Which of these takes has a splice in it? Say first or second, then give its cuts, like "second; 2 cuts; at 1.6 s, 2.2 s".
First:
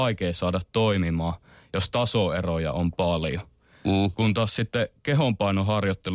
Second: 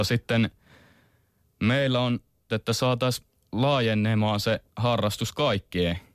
second; 1 cut; at 2.5 s